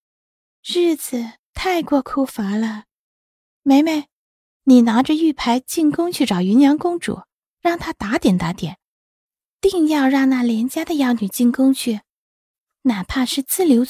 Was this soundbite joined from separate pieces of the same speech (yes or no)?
yes